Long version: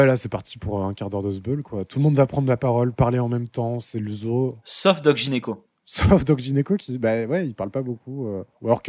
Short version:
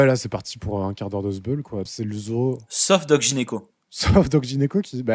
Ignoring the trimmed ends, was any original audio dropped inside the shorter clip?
yes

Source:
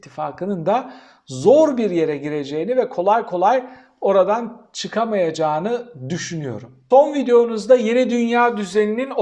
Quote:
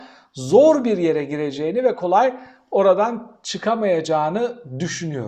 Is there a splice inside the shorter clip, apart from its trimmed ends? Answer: yes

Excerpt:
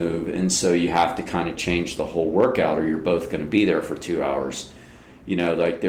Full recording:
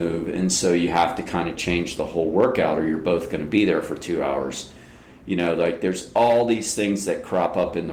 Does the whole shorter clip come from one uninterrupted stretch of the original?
yes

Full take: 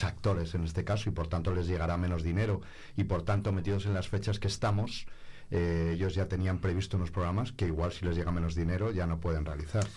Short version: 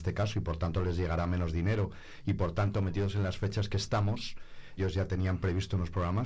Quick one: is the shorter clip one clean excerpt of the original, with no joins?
no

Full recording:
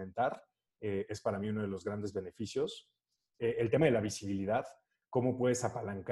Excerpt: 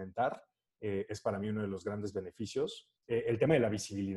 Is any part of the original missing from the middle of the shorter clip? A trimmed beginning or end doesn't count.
yes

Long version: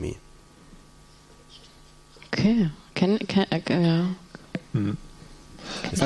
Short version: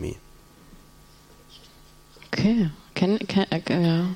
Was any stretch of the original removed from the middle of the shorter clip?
no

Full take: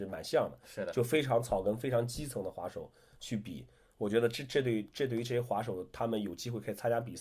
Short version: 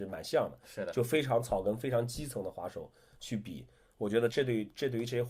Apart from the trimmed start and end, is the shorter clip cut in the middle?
yes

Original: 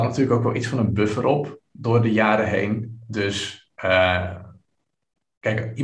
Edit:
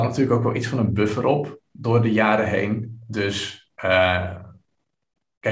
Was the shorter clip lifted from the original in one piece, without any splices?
yes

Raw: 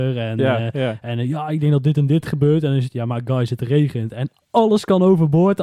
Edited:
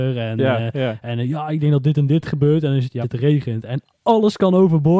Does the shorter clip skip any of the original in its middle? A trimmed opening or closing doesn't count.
yes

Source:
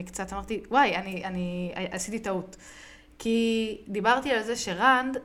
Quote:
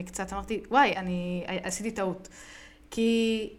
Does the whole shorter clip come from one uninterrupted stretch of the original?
no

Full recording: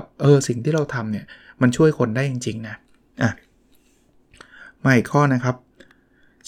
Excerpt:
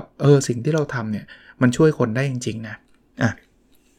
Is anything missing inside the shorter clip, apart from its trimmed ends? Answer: no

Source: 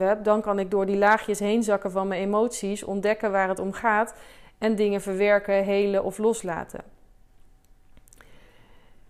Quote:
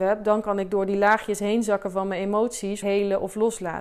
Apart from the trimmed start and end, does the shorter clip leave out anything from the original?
yes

